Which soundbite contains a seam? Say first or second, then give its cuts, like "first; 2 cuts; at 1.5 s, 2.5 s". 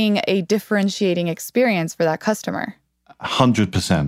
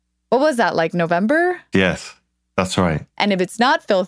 second; 2 cuts; at 1.7 s, 3.1 s